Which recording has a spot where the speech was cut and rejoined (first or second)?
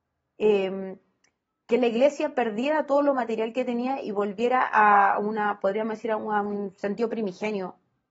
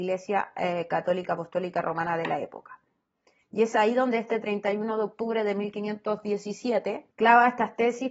second